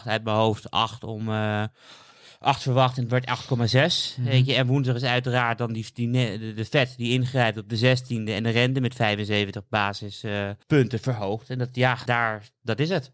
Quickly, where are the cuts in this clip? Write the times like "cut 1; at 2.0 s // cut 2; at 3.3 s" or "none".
cut 1; at 10.6 s // cut 2; at 12.1 s